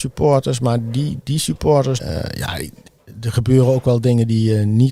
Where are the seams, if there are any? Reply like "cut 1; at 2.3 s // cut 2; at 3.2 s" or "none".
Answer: cut 1; at 2.0 s